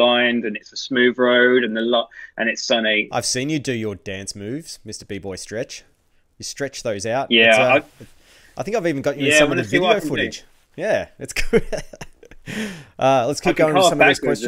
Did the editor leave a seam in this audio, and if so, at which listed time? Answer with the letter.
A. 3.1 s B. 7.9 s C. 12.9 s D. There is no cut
A